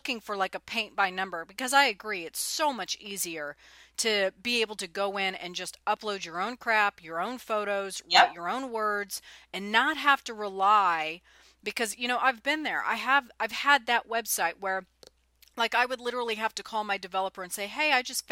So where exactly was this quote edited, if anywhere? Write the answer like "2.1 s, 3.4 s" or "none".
none